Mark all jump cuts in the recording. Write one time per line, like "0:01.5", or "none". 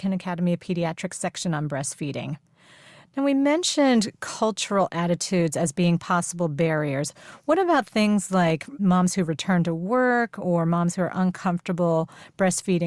none